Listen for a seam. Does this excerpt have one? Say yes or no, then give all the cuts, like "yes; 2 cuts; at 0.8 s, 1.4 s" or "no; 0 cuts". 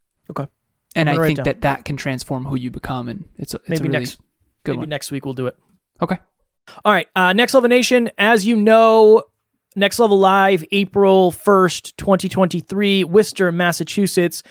no; 0 cuts